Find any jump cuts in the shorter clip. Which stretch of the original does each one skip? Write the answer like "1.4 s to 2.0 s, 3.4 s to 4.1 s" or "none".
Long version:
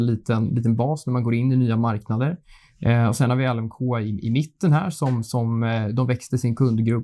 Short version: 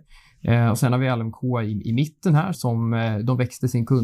4.9 s to 5.2 s